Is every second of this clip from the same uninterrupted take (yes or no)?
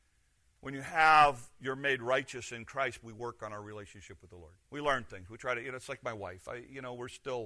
no